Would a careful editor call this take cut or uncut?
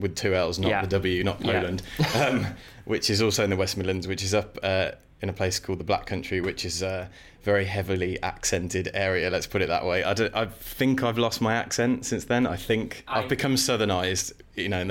uncut